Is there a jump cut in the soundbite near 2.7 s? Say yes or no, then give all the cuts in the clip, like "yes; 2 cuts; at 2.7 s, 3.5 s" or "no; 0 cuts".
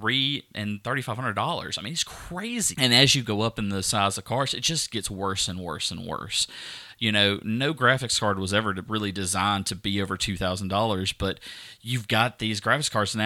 yes; 1 cut; at 2.7 s